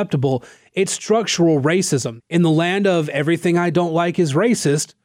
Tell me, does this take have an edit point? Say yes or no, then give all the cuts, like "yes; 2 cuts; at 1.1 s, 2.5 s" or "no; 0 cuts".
yes; 1 cut; at 2.2 s